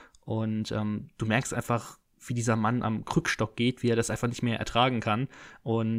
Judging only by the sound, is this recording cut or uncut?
uncut